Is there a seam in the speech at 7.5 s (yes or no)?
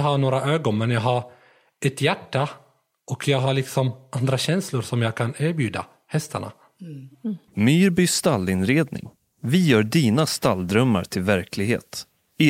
yes